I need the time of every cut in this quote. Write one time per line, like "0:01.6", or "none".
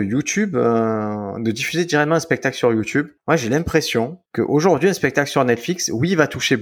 0:03.2
0:04.3